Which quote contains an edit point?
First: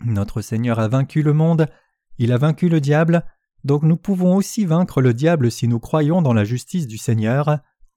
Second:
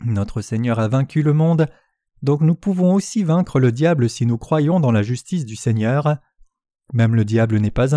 second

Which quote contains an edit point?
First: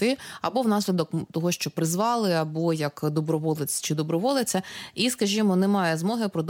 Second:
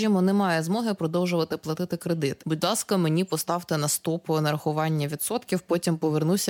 second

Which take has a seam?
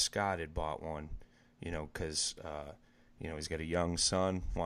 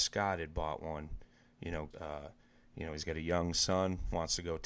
second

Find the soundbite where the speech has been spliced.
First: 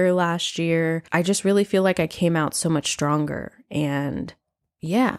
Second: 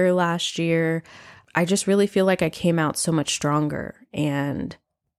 first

